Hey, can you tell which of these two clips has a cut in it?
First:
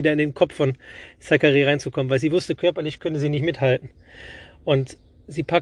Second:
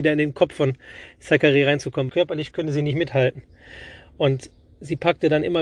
second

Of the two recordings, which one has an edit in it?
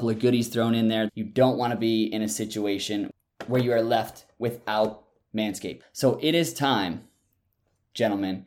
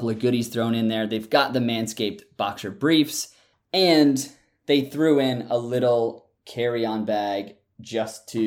first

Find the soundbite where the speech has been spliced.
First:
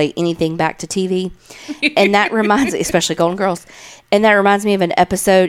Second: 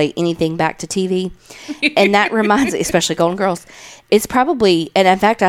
second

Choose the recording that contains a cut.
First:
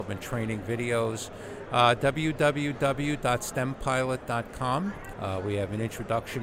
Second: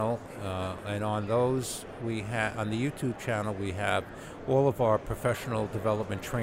first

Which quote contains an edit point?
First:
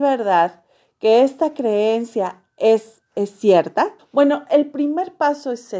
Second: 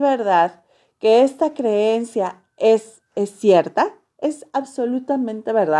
first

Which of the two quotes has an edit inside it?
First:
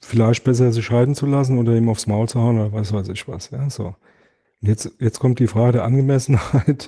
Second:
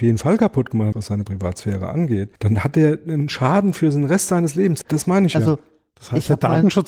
second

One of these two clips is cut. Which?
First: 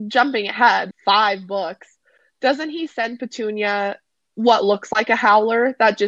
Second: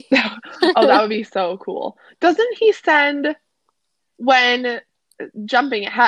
first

